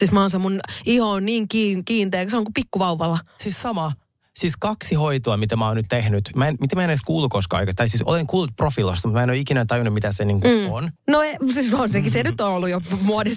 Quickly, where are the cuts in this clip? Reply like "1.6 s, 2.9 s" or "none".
11.0 s

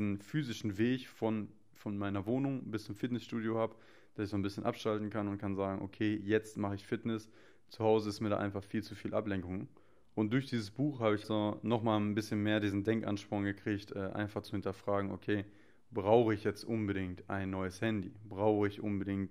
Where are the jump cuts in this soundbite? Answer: 11.2 s

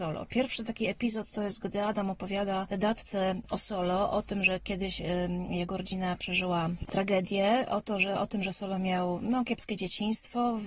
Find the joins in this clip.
none

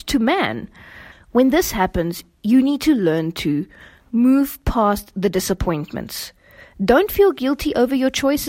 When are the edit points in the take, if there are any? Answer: 1.1 s

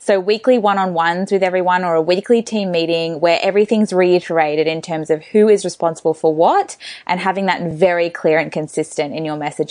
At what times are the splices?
none

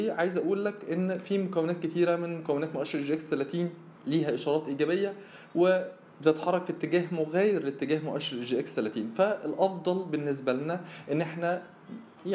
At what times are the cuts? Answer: 4.0 s

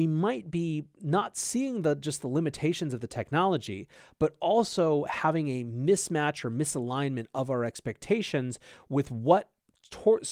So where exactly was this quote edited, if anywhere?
none

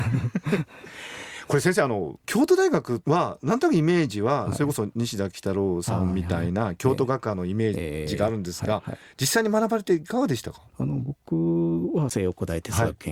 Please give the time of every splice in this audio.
10.7 s

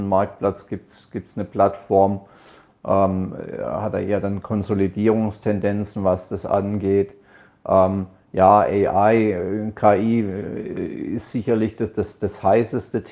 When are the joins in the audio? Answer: none

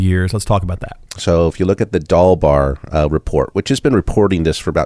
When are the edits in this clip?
1.1 s

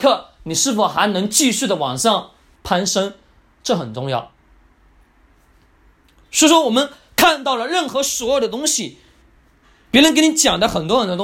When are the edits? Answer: none

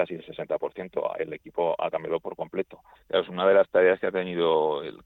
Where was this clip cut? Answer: 3.0 s

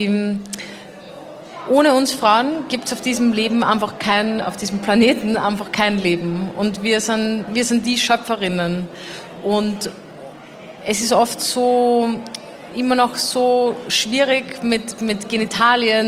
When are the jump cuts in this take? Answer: 4.4 s, 15.0 s

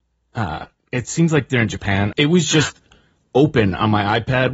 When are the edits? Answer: 2.1 s

